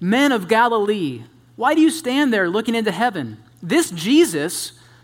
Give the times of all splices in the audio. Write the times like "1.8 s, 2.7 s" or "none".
none